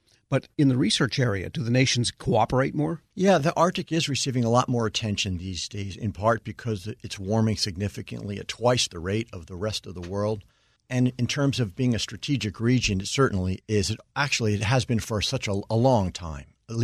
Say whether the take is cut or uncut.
uncut